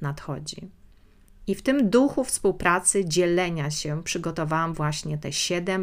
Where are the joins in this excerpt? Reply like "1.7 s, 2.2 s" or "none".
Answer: none